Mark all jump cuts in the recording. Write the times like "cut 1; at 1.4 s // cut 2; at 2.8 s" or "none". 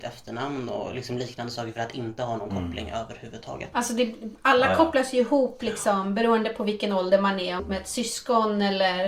cut 1; at 3.7 s // cut 2; at 7.6 s